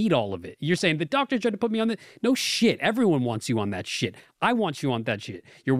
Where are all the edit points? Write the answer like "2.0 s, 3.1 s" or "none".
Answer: none